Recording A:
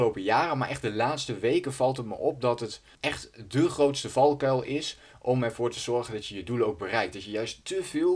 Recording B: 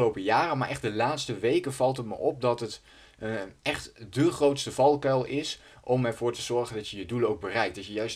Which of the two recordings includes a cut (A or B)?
A